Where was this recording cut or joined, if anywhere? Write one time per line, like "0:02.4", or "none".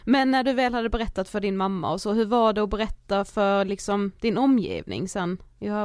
none